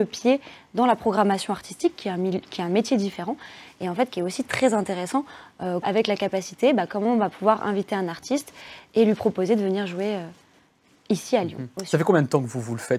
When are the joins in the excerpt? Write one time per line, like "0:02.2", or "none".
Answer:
0:05.8